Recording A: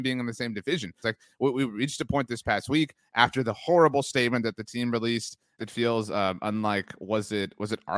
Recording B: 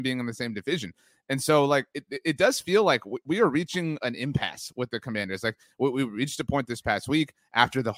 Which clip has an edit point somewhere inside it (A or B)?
A